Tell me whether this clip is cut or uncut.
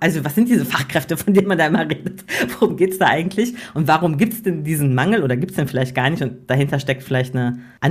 uncut